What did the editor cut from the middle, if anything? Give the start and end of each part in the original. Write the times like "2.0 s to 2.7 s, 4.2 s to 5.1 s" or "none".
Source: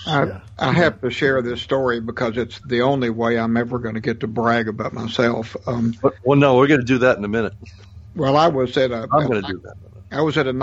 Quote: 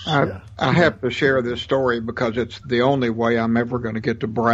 none